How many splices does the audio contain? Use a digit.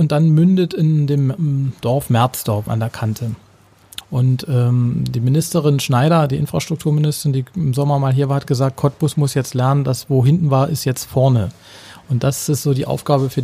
2